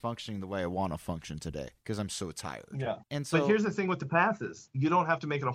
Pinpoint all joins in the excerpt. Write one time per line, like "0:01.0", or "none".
0:01.8
0:03.0